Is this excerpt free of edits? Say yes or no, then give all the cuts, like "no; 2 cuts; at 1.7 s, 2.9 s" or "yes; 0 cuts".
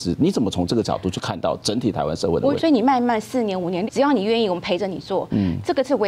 no; 2 cuts; at 2.6 s, 3.9 s